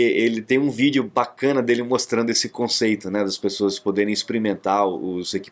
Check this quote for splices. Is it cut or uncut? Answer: uncut